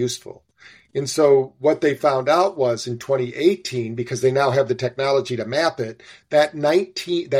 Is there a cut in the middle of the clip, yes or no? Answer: no